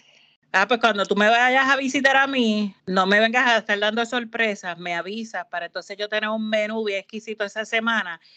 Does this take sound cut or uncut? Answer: cut